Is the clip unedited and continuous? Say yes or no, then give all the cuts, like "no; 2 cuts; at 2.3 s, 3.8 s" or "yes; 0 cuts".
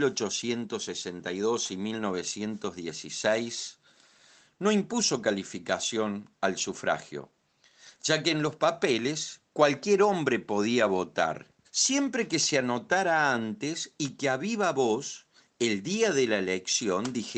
no; 1 cut; at 11.6 s